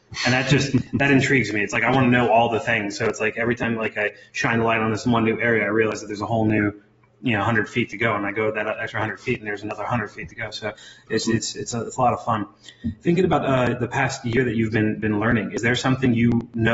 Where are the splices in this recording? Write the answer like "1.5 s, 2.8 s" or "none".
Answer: none